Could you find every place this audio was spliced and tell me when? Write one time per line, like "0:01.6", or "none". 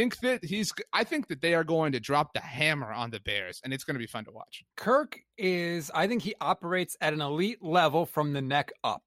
0:04.7

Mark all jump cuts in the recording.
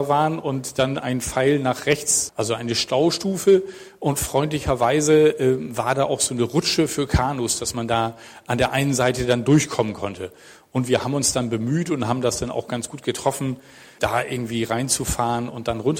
0:02.3
0:14.0

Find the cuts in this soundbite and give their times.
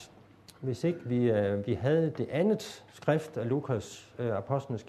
none

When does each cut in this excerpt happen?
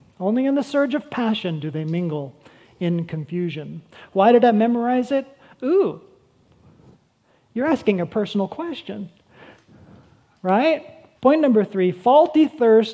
0:11.2

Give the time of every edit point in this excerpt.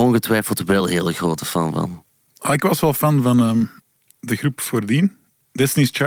none

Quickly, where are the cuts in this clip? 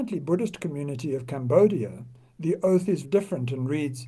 0:03.0

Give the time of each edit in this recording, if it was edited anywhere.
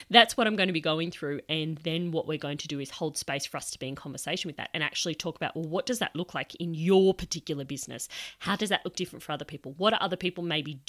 none

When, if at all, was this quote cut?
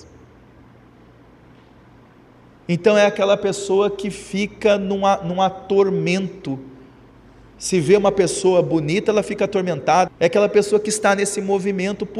0:10.1

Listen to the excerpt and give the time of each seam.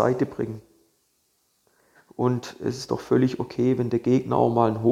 0:01.9

